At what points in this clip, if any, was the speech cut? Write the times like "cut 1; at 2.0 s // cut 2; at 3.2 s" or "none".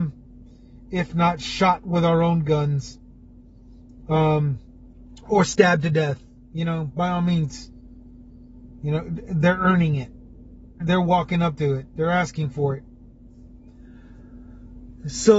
cut 1; at 10.8 s